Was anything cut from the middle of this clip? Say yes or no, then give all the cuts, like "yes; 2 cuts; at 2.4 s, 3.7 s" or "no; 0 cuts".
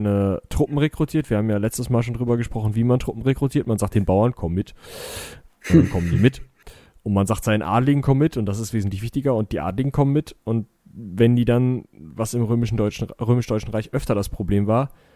no; 0 cuts